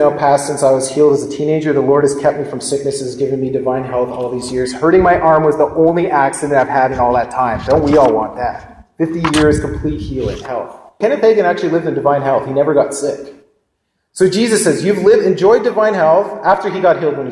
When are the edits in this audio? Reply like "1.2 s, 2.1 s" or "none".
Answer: 11.0 s